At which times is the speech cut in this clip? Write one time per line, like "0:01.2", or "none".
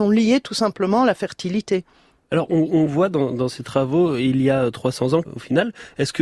0:05.2